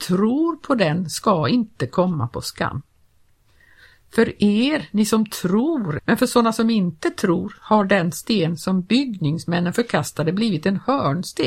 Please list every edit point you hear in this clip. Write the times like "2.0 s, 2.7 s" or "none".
6.0 s